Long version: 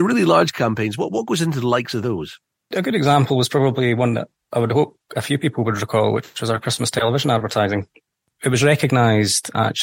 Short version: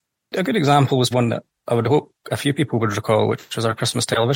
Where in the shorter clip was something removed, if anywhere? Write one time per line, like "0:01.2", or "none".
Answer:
0:01.1